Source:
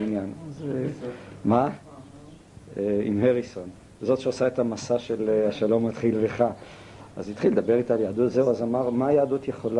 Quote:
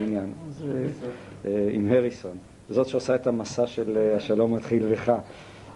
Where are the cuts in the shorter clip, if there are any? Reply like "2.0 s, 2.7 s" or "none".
1.4 s